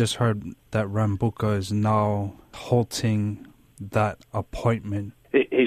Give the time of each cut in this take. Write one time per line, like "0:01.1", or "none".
none